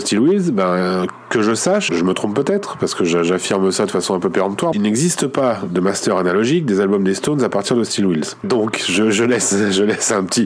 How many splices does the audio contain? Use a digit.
3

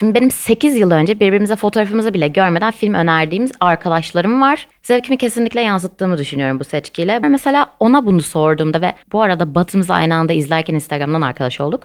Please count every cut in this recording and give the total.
3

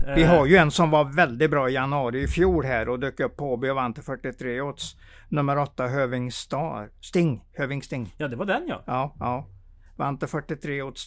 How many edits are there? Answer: 0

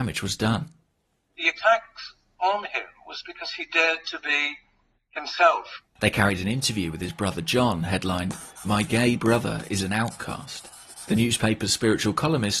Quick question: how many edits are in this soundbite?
1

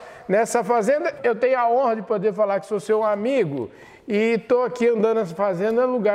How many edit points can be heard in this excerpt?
1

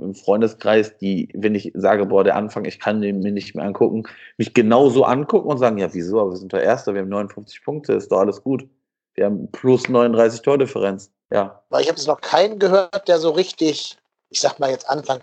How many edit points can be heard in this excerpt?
1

